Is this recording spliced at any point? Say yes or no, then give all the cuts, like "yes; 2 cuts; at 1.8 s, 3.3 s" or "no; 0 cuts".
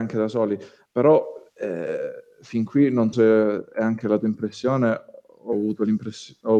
yes; 1 cut; at 3.1 s